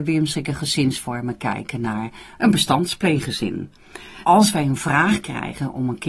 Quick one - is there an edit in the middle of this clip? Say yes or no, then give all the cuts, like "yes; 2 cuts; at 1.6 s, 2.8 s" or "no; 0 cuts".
yes; 1 cut; at 4.2 s